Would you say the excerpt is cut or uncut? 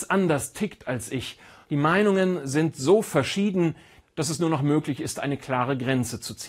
cut